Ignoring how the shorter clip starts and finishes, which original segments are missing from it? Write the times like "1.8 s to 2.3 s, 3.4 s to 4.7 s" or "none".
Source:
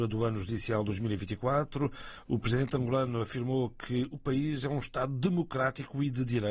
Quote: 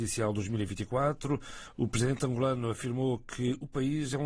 none